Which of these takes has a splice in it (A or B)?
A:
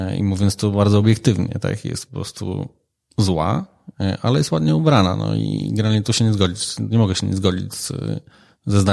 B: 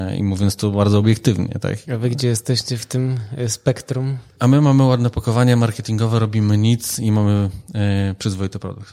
B